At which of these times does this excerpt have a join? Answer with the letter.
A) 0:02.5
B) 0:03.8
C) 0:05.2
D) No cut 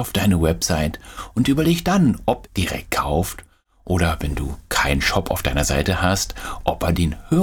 A